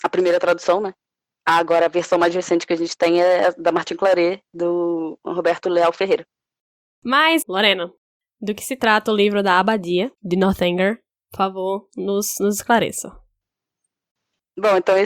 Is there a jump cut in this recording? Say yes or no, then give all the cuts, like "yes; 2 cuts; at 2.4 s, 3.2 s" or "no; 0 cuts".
yes; 2 cuts; at 1.4 s, 7.4 s